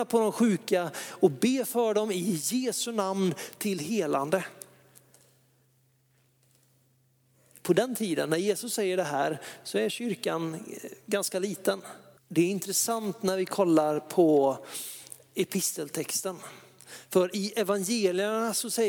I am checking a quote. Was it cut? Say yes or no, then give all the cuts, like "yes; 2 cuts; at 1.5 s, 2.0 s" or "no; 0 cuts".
yes; 1 cut; at 12.2 s